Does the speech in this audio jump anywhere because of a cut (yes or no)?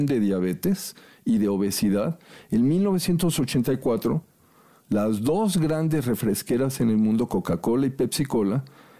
no